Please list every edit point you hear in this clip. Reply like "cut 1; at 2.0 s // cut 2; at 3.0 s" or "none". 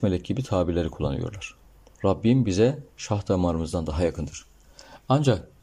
cut 1; at 2.0 s